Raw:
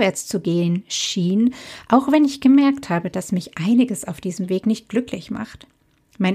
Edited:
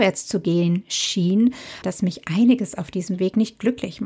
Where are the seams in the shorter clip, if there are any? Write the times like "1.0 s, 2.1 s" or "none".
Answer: 1.8 s